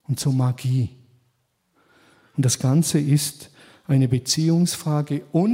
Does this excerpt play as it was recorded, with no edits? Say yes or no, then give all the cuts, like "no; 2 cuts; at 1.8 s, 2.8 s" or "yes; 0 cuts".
yes; 0 cuts